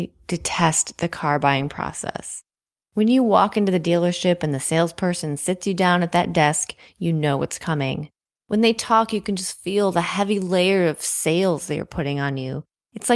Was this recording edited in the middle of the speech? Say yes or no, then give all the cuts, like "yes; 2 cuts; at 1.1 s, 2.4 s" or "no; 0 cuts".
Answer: no; 0 cuts